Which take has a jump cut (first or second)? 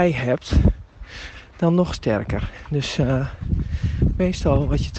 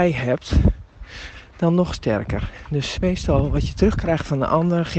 second